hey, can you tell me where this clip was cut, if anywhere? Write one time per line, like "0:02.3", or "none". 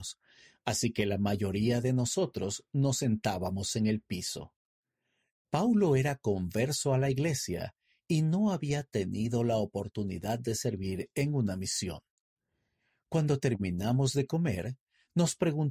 none